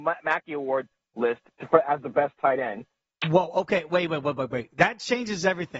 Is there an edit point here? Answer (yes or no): yes